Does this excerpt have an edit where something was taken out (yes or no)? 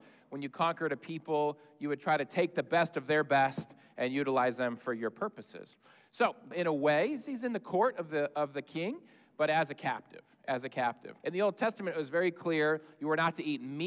yes